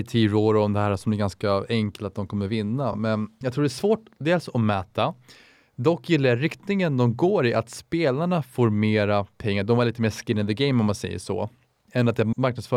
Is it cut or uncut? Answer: uncut